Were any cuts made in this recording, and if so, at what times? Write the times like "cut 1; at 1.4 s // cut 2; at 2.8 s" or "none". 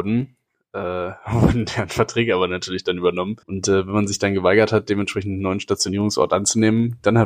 cut 1; at 3.4 s